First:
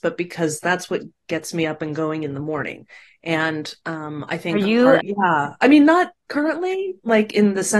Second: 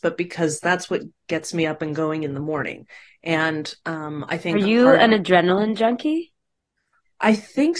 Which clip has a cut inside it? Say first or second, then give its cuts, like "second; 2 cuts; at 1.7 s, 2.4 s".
first; 1 cut; at 5.0 s